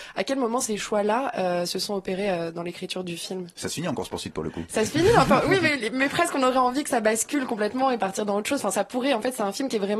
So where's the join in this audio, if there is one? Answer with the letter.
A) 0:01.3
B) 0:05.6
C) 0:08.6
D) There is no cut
D